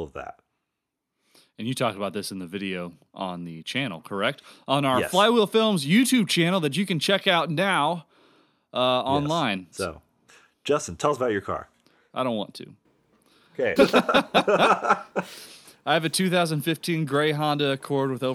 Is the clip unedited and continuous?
no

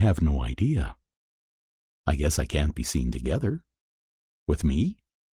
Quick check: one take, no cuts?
yes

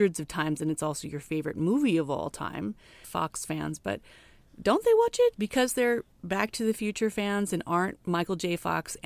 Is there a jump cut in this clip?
yes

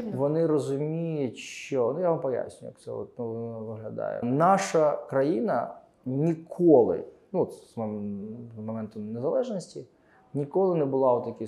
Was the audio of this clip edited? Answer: yes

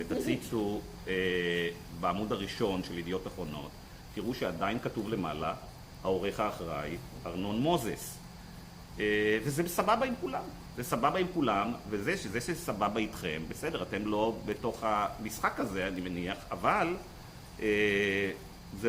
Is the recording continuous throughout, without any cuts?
yes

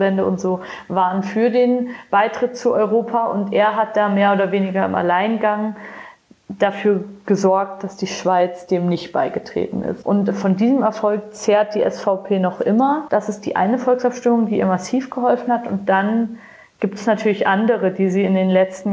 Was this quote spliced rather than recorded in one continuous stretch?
no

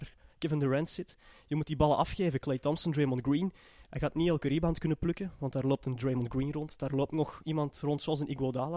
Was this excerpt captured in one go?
yes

